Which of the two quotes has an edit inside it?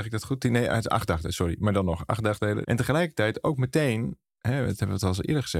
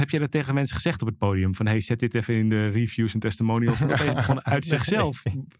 first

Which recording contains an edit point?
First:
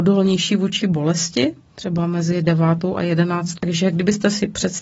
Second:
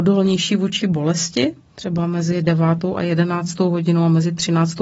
first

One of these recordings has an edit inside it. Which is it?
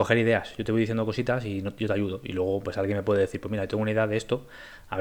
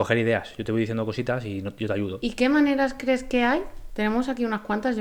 second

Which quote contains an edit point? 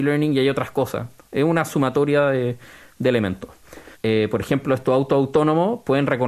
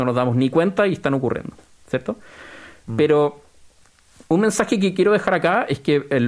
first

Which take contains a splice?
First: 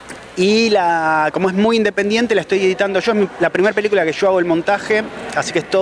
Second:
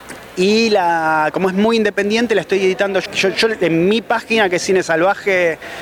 second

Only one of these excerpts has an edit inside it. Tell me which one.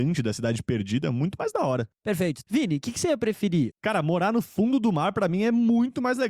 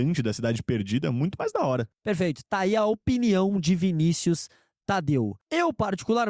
first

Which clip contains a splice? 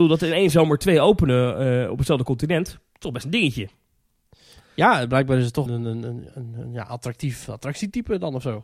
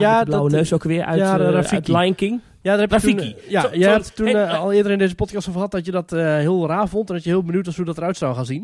first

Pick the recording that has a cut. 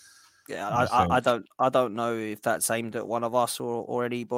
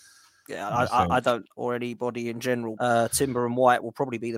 second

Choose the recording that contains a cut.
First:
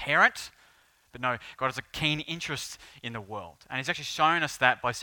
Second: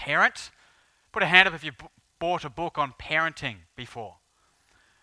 first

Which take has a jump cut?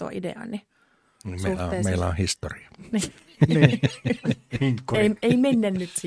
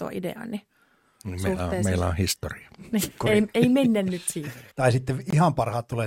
second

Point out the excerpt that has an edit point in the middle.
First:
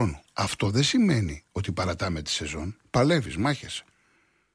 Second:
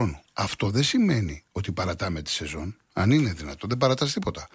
first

